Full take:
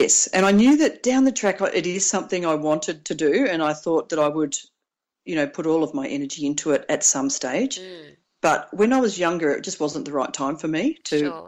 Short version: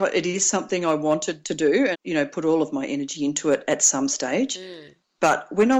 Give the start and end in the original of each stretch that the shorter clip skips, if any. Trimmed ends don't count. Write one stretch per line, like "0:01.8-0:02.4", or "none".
0:03.5-0:05.1